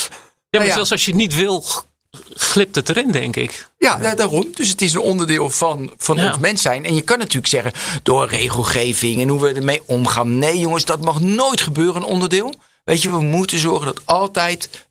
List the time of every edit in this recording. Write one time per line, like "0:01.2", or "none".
none